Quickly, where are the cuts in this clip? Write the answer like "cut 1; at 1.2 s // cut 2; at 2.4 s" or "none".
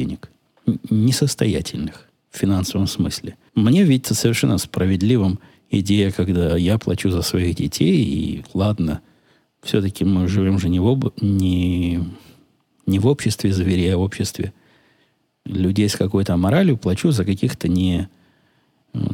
cut 1; at 3.5 s

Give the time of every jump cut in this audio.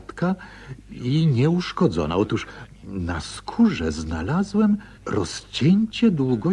cut 1; at 4.9 s

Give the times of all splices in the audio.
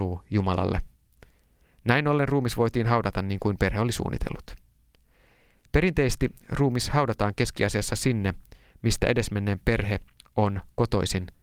none

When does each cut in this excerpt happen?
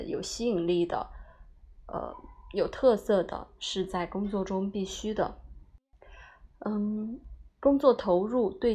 cut 1; at 6.5 s

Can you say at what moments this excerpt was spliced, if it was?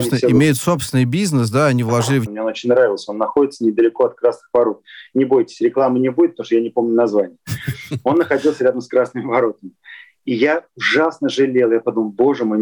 cut 1; at 2.3 s

